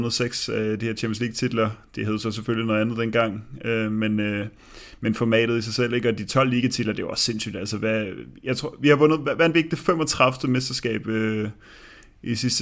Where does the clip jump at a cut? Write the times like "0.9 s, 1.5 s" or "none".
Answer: none